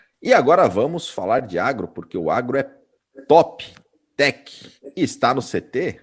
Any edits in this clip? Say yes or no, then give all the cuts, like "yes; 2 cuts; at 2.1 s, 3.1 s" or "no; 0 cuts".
no; 0 cuts